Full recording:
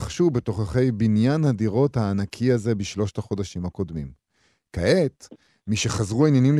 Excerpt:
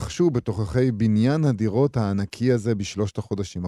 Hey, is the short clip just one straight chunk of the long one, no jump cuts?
yes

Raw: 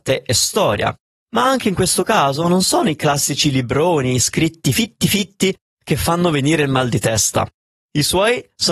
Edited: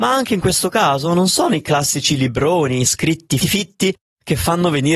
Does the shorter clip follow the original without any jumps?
no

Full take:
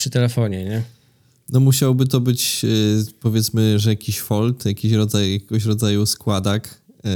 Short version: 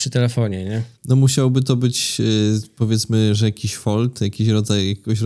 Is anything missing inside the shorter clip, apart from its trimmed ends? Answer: yes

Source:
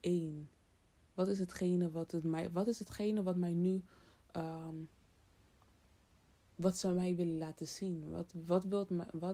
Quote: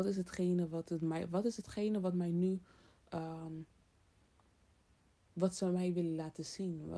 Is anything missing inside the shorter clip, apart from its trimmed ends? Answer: no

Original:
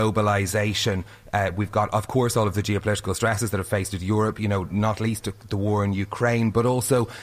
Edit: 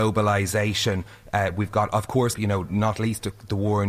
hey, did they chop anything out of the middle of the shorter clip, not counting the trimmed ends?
yes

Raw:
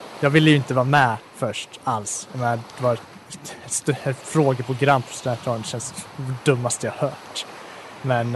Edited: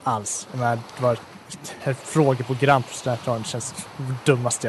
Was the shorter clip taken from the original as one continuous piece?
no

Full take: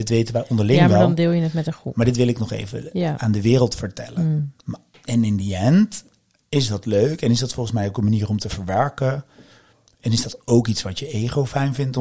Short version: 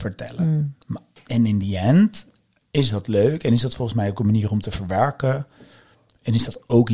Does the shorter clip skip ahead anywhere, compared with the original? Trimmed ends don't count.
no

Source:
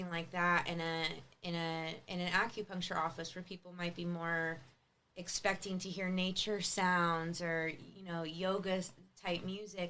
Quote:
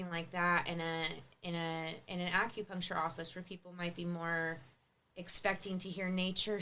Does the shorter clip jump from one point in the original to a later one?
no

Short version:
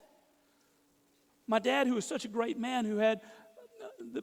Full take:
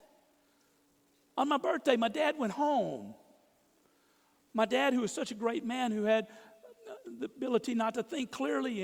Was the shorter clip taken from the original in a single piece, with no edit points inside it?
no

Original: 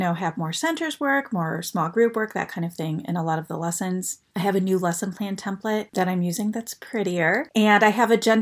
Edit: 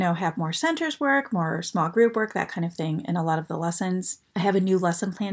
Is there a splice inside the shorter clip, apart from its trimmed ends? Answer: no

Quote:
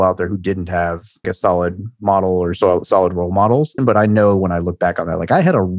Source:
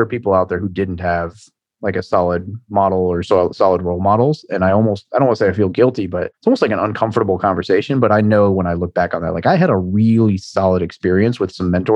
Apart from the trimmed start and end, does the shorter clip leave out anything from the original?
yes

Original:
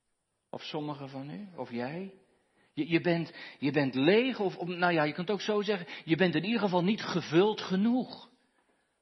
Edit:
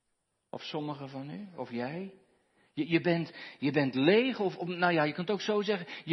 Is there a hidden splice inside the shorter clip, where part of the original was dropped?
no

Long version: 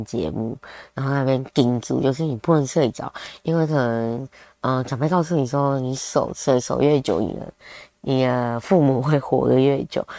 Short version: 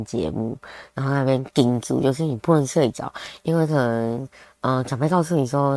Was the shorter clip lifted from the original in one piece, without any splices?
yes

